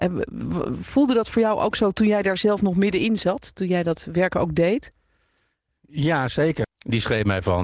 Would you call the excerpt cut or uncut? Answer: cut